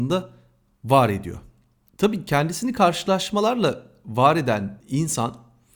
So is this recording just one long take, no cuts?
no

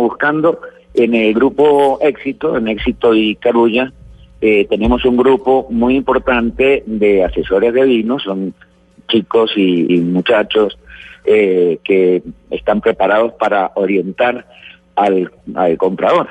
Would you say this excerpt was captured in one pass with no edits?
no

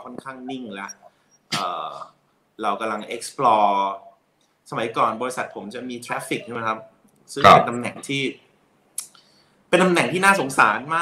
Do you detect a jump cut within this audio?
no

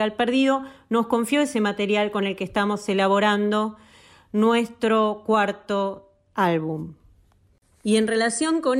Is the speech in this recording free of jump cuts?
yes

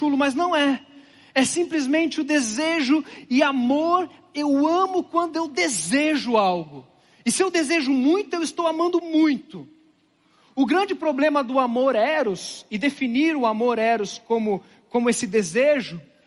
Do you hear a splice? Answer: no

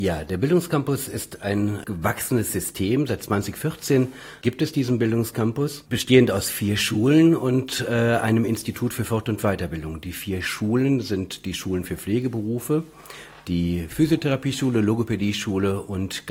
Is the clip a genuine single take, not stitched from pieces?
yes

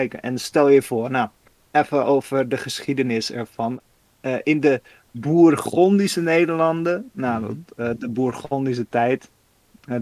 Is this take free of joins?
yes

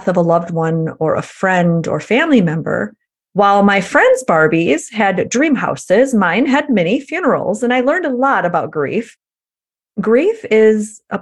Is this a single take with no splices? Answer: no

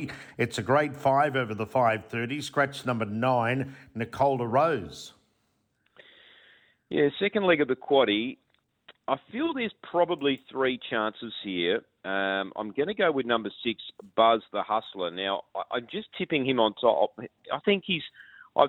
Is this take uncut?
no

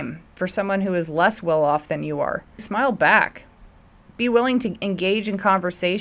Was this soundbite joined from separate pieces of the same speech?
yes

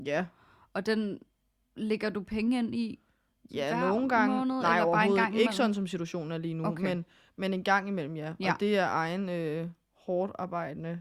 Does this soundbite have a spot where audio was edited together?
no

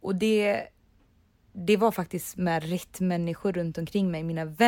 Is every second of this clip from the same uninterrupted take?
yes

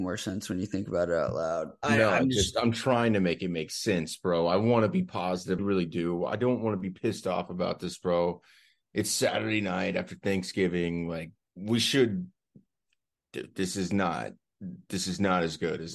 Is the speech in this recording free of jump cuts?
no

